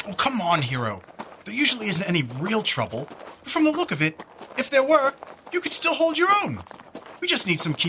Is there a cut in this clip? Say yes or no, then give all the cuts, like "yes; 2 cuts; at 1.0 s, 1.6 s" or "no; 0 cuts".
no; 0 cuts